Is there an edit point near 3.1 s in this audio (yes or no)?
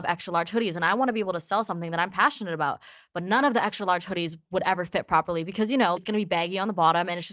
no